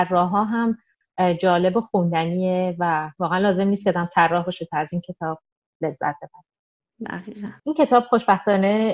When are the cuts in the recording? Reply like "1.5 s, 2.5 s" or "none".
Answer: 7.6 s